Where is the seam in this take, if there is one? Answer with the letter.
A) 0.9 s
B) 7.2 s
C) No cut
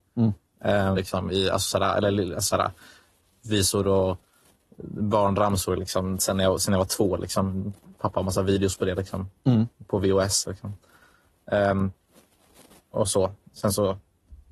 A